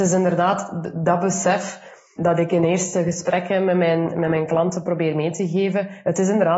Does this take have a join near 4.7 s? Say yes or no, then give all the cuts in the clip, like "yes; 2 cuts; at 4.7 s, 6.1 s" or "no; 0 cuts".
no; 1 cut; at 2.2 s